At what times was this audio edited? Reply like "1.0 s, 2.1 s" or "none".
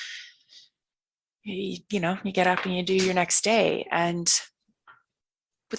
none